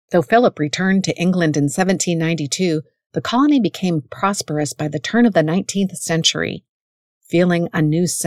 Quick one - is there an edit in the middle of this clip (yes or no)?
no